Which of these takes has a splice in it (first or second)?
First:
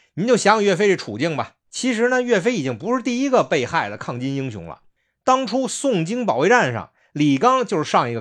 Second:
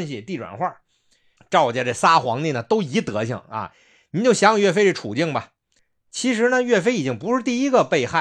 first